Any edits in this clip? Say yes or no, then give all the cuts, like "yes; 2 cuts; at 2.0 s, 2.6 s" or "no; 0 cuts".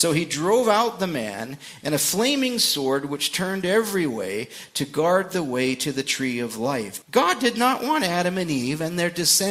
yes; 2 cuts; at 1.8 s, 7.0 s